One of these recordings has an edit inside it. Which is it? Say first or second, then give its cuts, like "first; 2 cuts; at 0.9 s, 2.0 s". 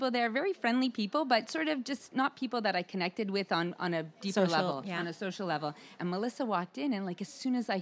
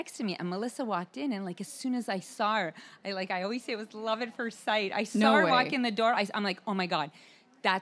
first; 1 cut; at 6.0 s